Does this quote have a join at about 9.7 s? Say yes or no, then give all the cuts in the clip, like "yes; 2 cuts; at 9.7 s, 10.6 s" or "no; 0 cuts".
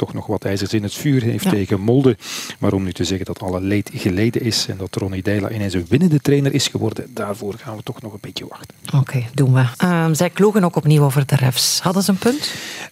yes; 1 cut; at 9.7 s